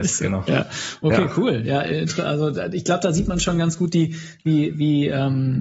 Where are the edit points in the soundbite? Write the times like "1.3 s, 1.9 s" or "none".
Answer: none